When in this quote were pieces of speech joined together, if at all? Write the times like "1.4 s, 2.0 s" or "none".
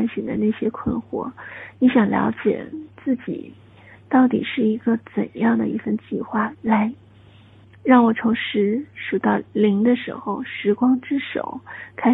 6.5 s